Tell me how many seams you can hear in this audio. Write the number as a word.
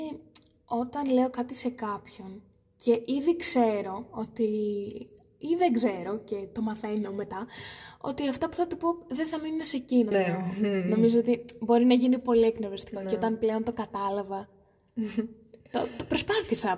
one